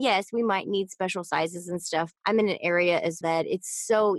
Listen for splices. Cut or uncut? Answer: cut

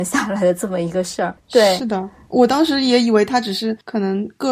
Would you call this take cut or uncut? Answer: uncut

